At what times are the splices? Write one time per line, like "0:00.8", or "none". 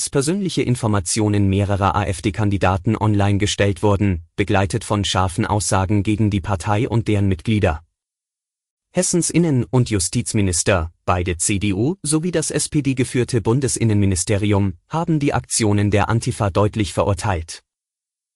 none